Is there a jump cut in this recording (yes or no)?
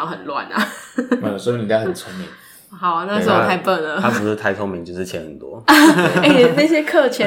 no